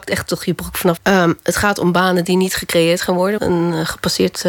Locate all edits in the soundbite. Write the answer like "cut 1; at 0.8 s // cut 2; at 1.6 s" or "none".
cut 1; at 1.0 s // cut 2; at 3.4 s